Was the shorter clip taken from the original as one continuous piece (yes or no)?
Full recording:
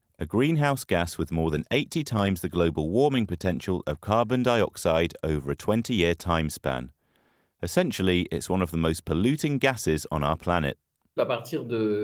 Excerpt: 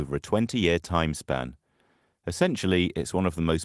yes